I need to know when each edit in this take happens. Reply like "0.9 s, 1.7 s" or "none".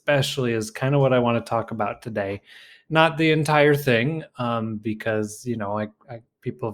none

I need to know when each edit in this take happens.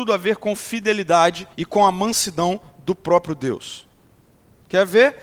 1.5 s

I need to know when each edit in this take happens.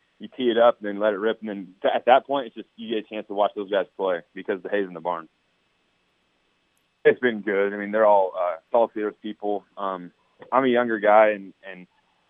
6.9 s, 8.7 s

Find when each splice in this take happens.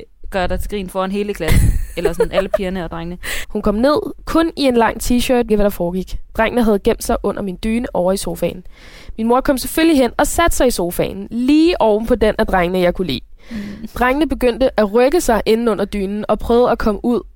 3.4 s, 5.5 s

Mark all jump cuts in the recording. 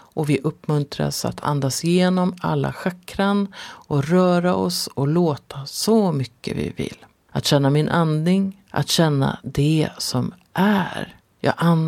7.3 s, 8.7 s

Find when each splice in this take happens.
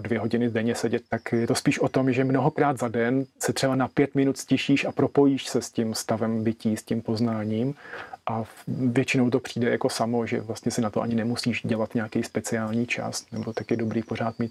1.1 s

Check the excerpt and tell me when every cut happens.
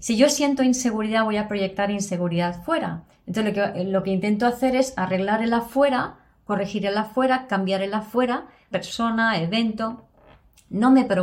8.7 s

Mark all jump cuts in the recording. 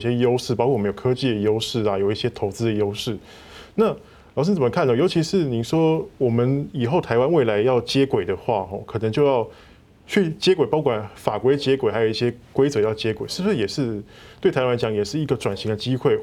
none

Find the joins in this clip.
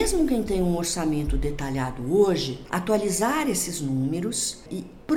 2.7 s

